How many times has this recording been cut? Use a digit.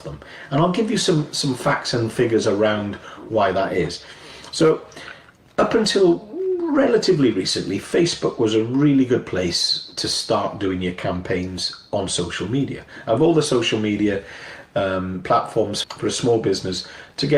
1